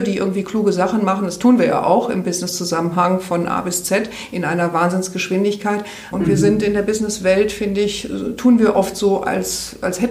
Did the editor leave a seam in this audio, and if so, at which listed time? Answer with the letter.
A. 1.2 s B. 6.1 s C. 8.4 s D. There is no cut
B